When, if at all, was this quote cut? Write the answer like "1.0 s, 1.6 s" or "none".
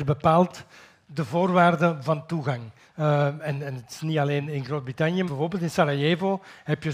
2.9 s, 5.3 s